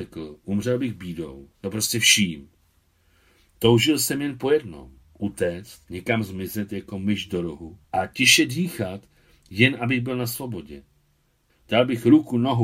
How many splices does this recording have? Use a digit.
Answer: 3